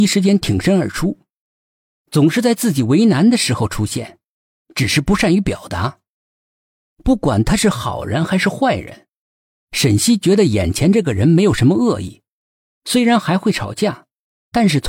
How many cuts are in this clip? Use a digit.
3